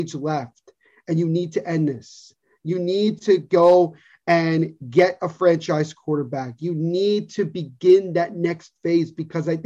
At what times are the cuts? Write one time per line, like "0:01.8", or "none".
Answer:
none